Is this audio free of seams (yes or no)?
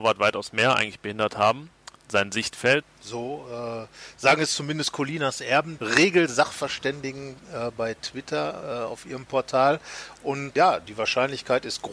no